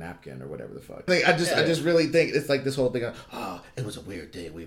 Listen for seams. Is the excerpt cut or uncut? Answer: cut